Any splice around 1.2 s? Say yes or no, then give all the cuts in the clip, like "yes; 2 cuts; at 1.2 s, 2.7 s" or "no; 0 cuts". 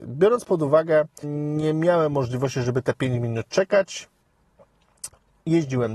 yes; 1 cut; at 1.2 s